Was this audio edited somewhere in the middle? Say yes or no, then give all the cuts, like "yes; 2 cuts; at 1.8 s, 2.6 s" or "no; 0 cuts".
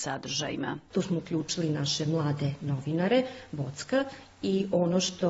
yes; 1 cut; at 0.9 s